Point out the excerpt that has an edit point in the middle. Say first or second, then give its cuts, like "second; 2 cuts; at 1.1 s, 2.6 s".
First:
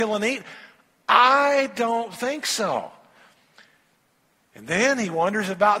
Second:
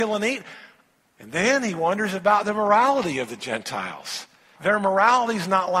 second; 2 cuts; at 1.0 s, 4.6 s